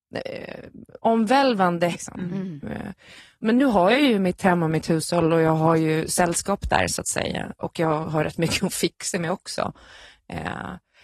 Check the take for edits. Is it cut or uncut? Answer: cut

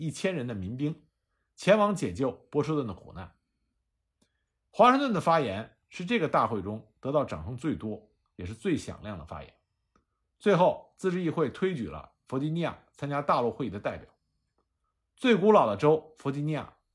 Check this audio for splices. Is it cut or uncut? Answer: uncut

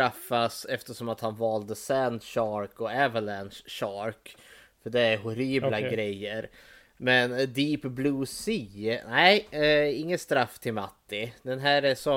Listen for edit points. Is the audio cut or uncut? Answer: uncut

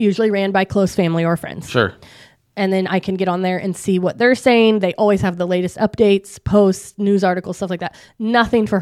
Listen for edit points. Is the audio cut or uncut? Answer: uncut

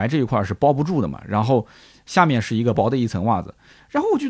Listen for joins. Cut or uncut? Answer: cut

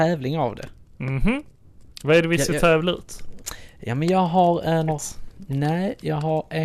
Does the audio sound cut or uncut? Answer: cut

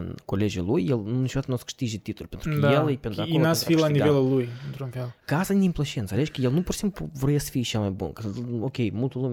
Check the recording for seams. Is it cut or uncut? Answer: uncut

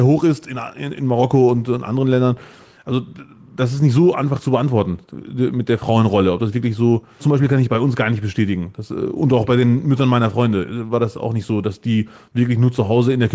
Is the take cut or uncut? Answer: cut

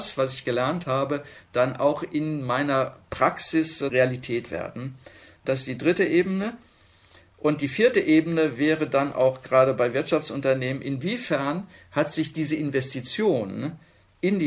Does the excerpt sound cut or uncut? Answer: uncut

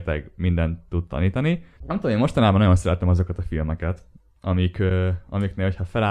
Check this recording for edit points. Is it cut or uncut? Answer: cut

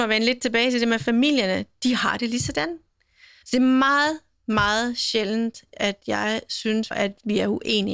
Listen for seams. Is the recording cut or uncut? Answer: cut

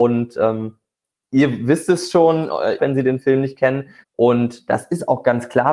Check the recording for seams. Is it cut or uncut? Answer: cut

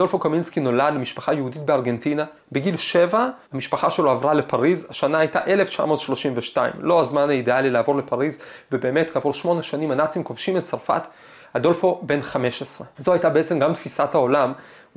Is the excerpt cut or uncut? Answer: cut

